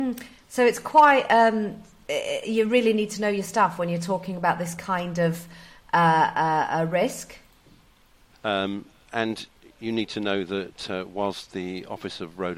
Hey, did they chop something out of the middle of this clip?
yes; 1 cut; at 8.3 s

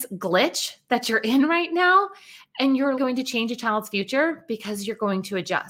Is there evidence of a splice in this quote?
yes; 1 cut; at 3.0 s

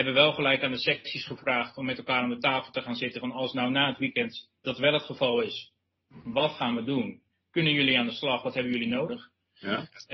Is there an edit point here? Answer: no; 0 cuts

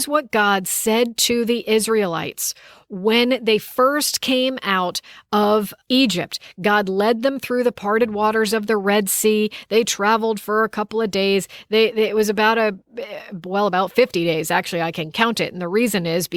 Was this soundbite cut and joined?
yes; 1 cut; at 5.8 s

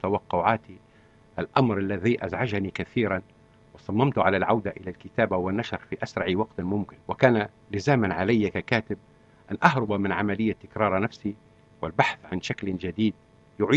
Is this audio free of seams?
no; 1 cut; at 7.0 s

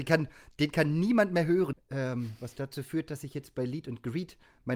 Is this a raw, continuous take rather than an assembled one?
no; 1 cut; at 1.7 s

